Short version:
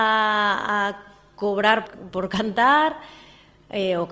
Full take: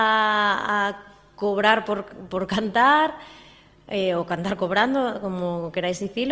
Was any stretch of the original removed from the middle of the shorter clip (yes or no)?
yes